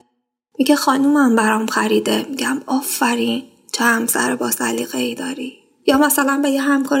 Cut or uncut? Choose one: uncut